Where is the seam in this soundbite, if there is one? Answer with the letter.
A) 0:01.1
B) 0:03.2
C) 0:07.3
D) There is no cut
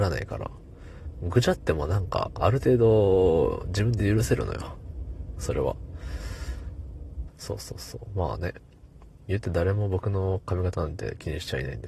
C